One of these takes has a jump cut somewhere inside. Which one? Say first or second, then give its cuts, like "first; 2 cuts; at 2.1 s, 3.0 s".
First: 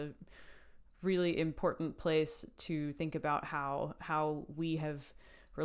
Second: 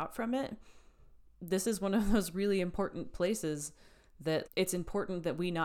second; 1 cut; at 4.5 s